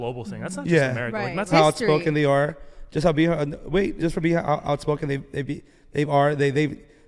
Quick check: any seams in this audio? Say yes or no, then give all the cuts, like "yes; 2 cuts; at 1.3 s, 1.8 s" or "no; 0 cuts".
yes; 2 cuts; at 1.5 s, 4.0 s